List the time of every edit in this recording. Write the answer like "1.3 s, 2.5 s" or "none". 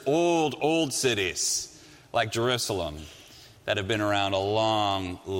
none